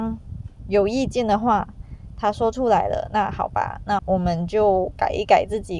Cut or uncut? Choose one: cut